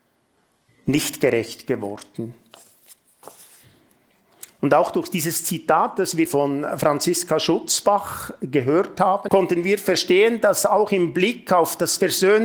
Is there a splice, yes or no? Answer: yes